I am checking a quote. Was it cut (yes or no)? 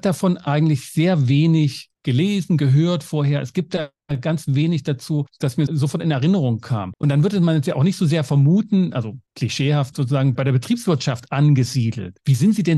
no